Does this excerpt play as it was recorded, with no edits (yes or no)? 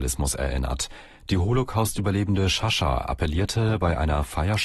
yes